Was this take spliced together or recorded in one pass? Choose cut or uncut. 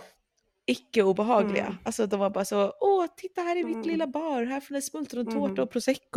uncut